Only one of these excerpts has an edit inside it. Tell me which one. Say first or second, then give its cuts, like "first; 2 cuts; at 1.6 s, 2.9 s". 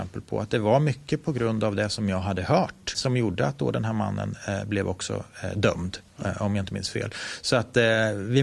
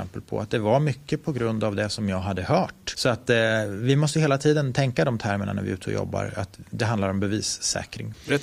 second; 1 cut; at 2.9 s